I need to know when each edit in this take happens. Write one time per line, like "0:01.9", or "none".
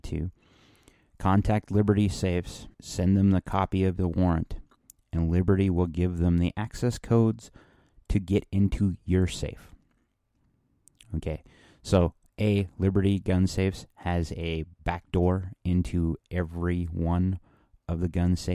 0:02.7